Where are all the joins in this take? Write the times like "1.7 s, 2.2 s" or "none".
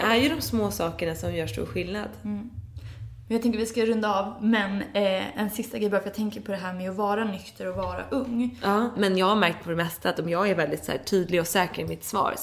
none